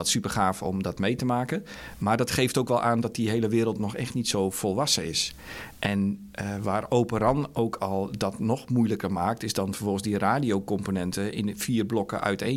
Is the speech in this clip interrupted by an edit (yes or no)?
no